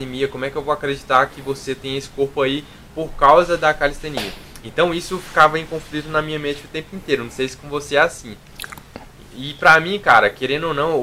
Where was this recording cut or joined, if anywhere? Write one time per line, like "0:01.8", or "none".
none